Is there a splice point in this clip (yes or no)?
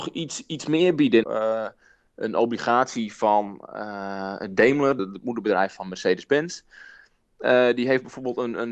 yes